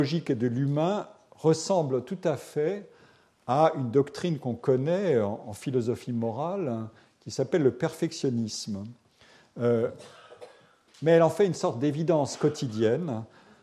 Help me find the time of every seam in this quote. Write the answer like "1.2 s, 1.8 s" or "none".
none